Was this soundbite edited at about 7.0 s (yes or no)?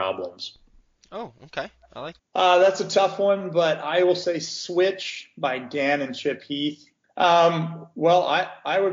yes